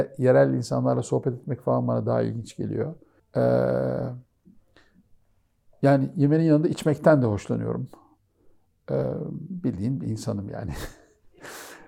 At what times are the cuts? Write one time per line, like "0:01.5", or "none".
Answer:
0:03.2